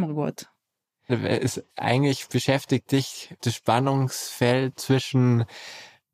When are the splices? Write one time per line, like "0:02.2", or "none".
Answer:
0:01.1
0:03.4
0:04.7

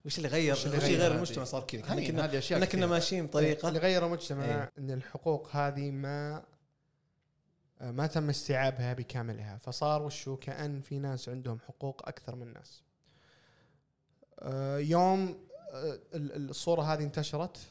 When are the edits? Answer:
0:04.7

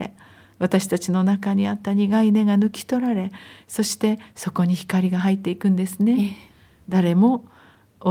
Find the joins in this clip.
none

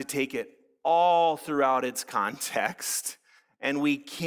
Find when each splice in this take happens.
none

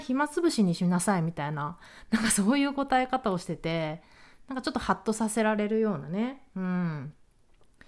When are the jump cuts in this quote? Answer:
none

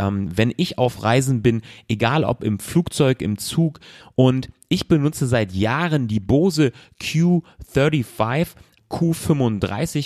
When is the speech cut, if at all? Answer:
0:04.0
0:08.8

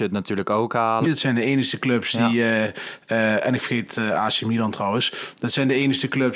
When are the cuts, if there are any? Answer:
0:01.0

